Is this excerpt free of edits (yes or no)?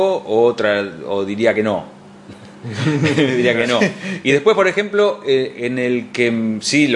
yes